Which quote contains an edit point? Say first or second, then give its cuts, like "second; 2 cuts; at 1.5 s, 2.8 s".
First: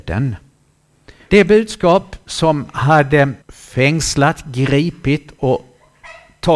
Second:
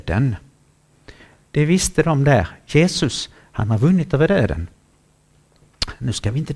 first; 2 cuts; at 1.3 s, 3.4 s